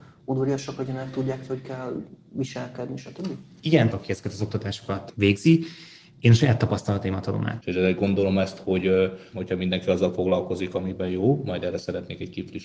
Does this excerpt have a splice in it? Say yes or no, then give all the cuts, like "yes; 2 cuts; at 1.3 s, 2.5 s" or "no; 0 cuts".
yes; 3 cuts; at 3.9 s, 7.6 s, 9.3 s